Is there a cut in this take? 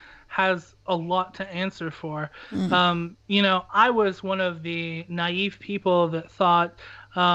no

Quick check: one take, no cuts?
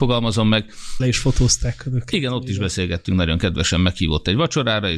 no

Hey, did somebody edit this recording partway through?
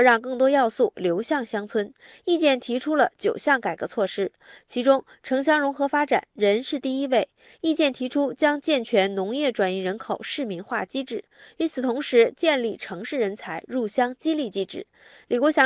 no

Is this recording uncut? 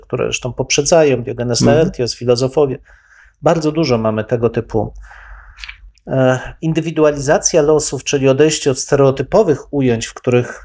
yes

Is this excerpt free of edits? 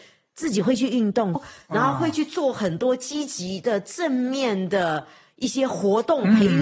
no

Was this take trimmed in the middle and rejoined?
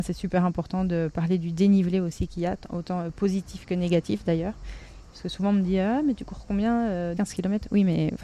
yes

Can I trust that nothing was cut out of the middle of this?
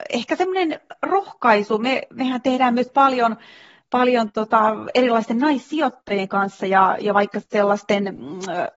yes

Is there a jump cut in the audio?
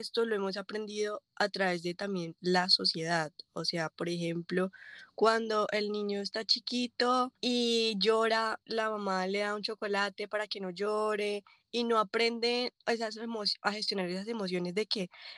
yes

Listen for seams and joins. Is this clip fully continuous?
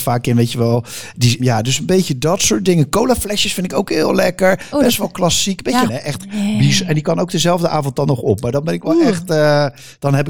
no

